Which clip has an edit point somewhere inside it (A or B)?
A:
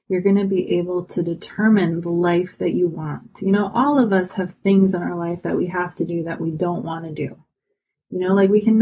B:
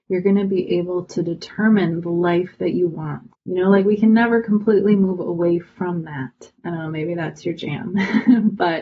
B